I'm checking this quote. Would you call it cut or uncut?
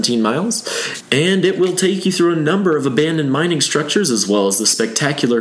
uncut